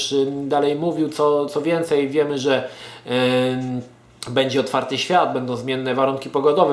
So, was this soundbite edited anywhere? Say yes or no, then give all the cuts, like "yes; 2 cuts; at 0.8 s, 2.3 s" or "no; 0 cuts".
yes; 1 cut; at 1.5 s